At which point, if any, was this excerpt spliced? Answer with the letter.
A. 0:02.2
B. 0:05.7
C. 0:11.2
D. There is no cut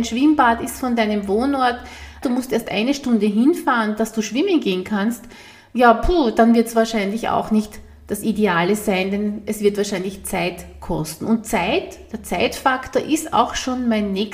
A